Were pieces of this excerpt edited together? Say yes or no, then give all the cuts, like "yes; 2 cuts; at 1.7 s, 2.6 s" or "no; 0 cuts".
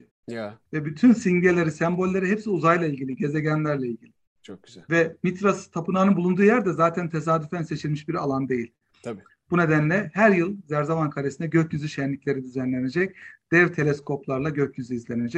yes; 1 cut; at 9.3 s